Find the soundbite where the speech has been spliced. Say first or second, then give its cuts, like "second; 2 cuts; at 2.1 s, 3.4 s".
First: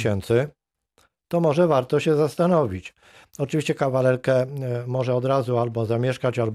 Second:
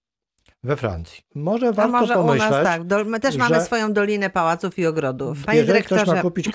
second; 2 cuts; at 1.2 s, 5.4 s